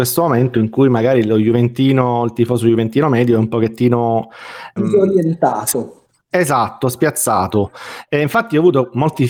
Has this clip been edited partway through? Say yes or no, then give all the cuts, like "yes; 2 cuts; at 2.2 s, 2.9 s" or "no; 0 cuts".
yes; 1 cut; at 4.8 s